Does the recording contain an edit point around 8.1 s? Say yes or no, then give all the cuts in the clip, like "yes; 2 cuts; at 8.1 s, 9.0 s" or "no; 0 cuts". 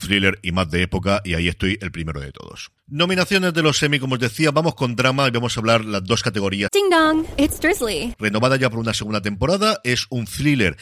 yes; 1 cut; at 8.1 s